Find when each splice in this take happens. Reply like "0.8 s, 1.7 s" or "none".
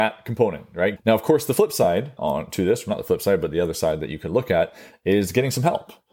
1.0 s, 2.2 s